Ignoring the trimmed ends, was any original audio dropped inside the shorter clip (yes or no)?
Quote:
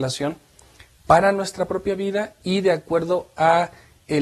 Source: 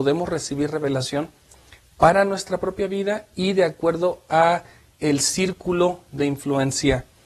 no